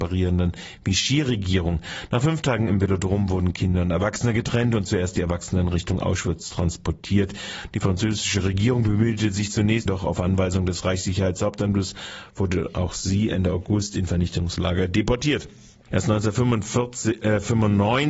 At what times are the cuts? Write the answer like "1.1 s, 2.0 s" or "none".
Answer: 9.9 s, 15.9 s

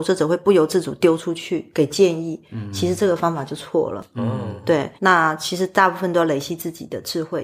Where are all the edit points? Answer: 5.0 s

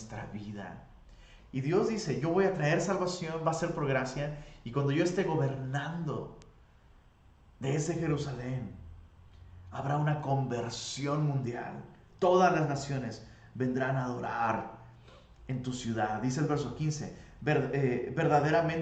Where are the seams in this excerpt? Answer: 1.4 s

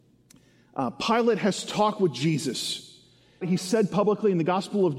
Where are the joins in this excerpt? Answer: 3.4 s

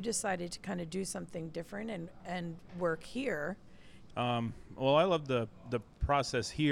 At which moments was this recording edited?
4.1 s

